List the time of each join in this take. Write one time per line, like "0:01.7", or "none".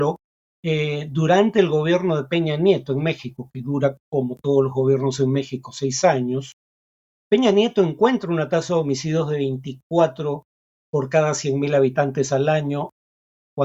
none

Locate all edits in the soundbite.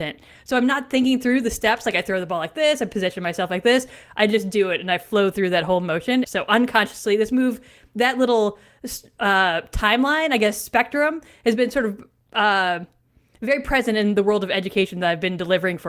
0:06.2

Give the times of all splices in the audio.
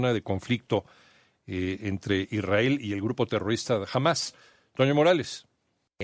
none

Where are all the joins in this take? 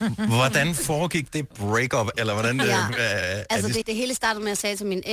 0:02.1
0:03.8

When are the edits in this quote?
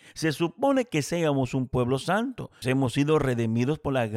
0:02.6

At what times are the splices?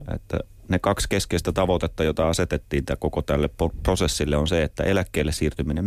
none

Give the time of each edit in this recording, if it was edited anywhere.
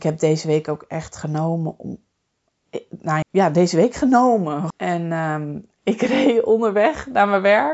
0:03.2
0:04.7

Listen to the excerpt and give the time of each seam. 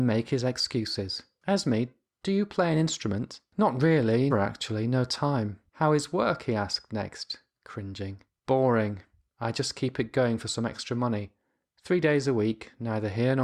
0:04.3

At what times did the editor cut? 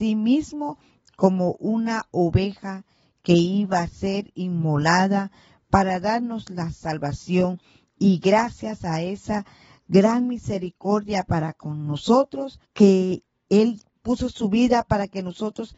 0:12.6

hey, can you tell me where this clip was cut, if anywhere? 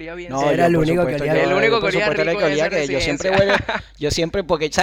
none

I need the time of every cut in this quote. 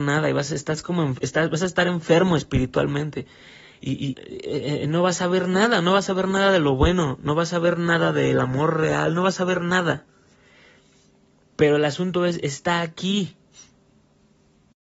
0:04.1

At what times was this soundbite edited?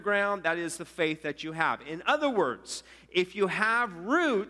none

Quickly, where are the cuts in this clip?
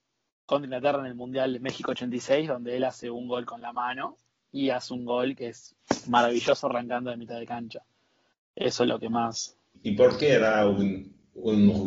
0:09.7

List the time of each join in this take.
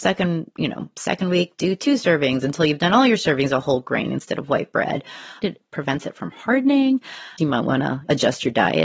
0:05.4
0:07.4

